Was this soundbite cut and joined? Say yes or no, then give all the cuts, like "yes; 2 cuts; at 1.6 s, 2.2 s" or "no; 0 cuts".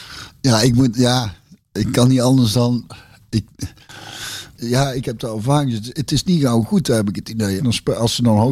yes; 2 cuts; at 4.6 s, 7.6 s